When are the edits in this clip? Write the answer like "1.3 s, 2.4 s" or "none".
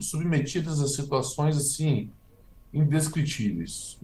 none